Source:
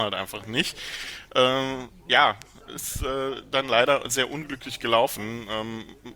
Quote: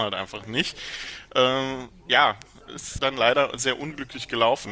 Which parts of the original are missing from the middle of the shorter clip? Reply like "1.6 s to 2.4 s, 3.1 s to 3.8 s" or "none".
3.0 s to 3.5 s

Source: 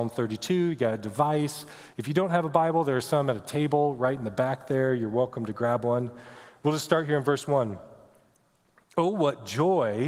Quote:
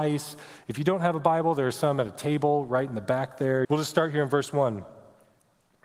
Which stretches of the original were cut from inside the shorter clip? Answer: 4.9 s to 6.6 s

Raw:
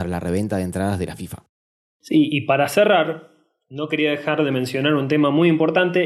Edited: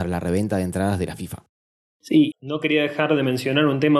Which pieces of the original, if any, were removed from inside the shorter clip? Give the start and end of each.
2.3 s to 3.6 s

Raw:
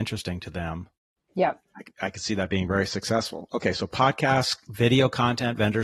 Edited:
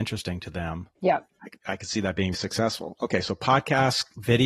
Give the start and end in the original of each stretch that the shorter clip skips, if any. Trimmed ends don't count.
0.9 s to 1.3 s, 2.7 s to 2.9 s

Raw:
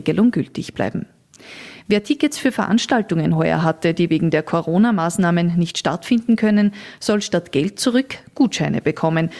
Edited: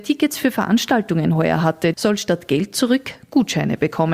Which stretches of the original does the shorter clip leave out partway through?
3.9 s to 7.0 s

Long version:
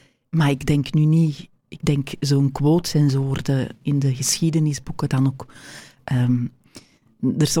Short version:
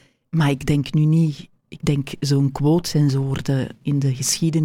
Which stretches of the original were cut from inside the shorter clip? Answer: none

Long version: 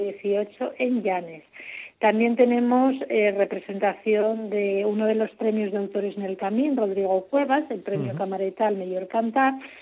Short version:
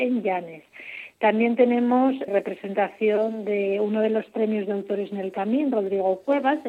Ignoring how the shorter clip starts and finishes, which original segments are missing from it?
3.1 s to 3.3 s

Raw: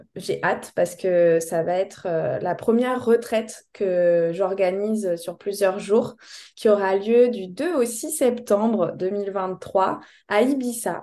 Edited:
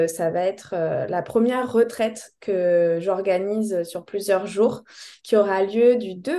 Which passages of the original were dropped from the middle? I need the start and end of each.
none

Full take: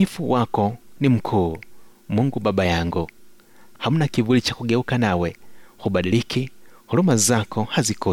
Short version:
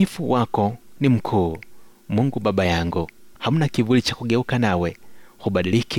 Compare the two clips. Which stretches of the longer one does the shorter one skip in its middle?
3.3 s to 3.7 s

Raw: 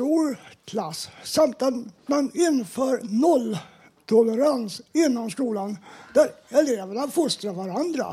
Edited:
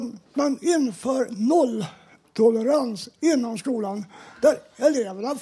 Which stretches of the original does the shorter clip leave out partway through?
none

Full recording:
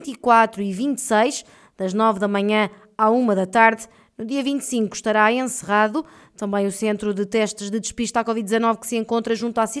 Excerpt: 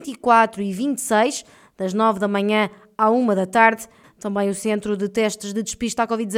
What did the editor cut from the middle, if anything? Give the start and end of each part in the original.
4.0 s to 6.2 s

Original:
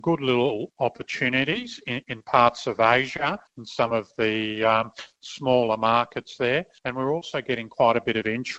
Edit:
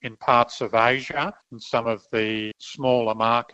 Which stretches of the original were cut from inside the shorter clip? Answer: 4.6 s to 5.1 s

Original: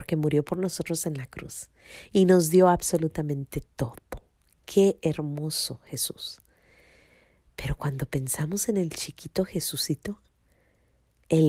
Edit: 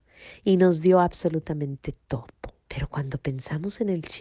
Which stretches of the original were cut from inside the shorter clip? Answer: 4.3 s to 7.5 s

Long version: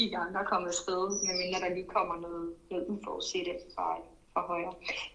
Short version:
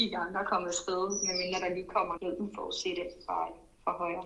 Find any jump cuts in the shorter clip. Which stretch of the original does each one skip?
2.2 s to 2.7 s

